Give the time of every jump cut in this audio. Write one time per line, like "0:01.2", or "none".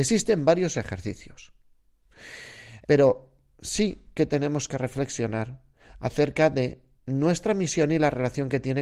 0:02.8